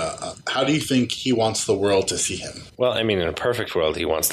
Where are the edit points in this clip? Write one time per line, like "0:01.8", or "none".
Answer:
0:02.7